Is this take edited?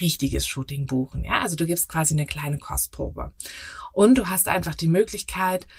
no; 0 cuts

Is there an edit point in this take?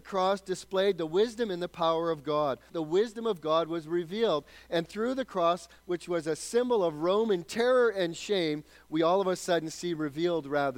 yes; 1 cut; at 2.7 s

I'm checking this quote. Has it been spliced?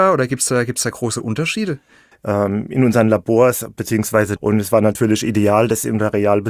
yes; 2 cuts; at 2.1 s, 4.4 s

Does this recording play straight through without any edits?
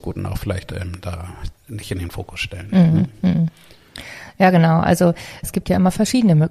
no; 2 cuts; at 1.6 s, 5.4 s

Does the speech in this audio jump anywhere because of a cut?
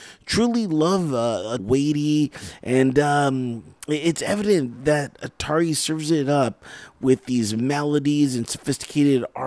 yes; 1 cut; at 1.6 s

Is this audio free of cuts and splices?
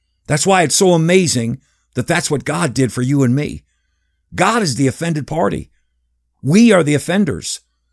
yes; 0 cuts

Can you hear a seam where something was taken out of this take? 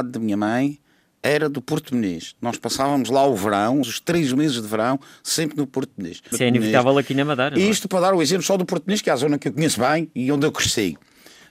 yes; 2 cuts; at 3.8 s, 6.3 s

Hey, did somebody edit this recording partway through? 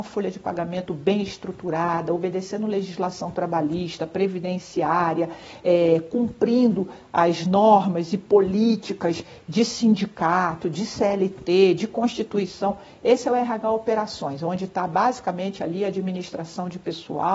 no; 0 cuts

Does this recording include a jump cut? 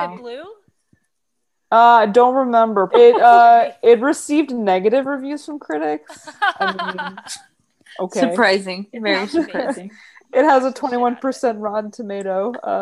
yes; 1 cut; at 2.9 s

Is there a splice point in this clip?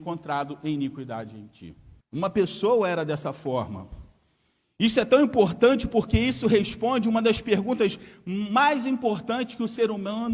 yes; 1 cut; at 2.0 s

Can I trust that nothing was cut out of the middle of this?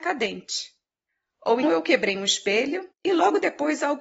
no; 1 cut; at 1.6 s

